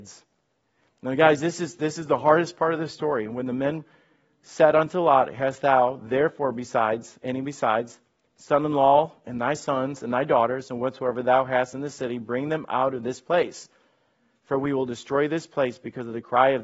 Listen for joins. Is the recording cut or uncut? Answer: uncut